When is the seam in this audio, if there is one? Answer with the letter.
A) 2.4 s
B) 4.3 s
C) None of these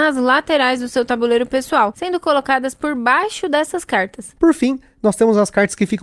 B